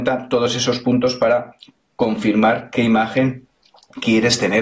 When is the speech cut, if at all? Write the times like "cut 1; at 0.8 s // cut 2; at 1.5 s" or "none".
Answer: none